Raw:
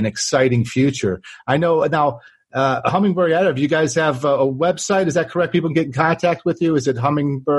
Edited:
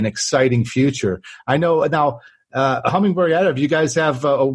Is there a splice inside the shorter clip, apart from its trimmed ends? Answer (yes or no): no